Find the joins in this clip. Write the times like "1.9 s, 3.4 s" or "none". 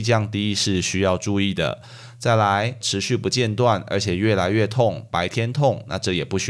2.8 s

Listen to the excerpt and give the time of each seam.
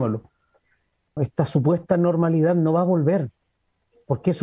1.2 s

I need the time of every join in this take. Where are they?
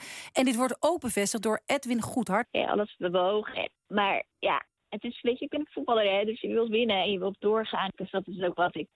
2.4 s

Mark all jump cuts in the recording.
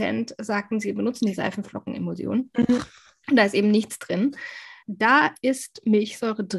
4.8 s

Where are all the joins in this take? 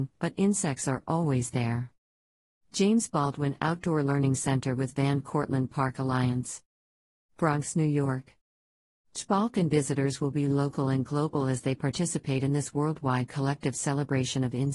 none

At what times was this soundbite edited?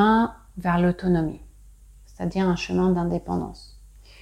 none

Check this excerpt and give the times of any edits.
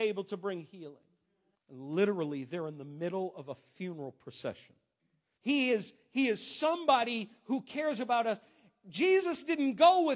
1.5 s, 5.4 s

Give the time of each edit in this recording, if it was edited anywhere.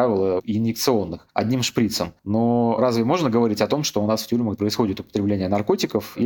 2.2 s, 4.6 s

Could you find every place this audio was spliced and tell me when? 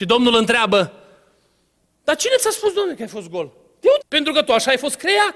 4.0 s

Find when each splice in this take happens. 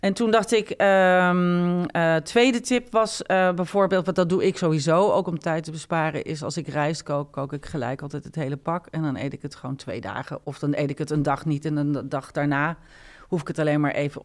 none

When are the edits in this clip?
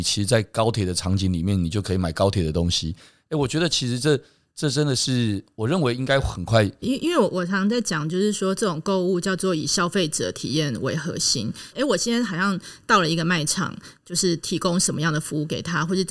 6.8 s, 11.7 s

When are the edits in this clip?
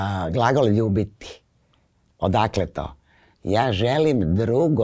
3.3 s

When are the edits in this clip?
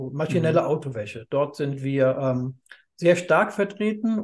none

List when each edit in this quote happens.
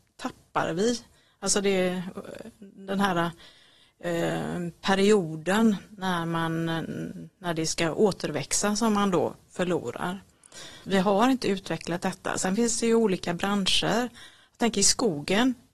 10.8 s

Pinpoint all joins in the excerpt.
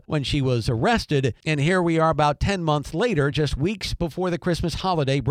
none

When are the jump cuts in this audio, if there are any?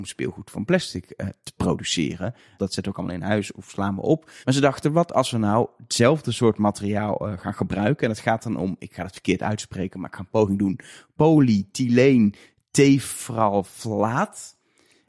2.6 s, 4.4 s

